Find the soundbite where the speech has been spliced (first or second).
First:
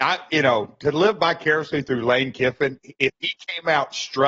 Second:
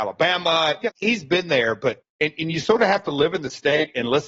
second